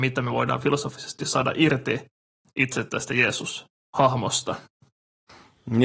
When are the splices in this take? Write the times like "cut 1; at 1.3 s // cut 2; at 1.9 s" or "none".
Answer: none